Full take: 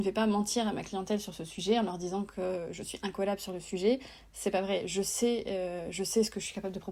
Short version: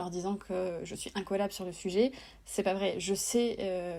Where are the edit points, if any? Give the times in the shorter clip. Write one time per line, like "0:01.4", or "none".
none